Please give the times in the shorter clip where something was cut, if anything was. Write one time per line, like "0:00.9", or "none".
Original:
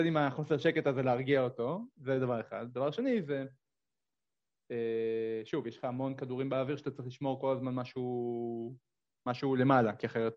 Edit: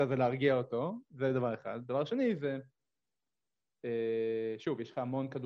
none